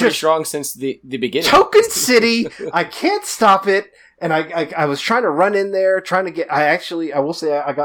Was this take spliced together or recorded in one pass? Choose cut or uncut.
uncut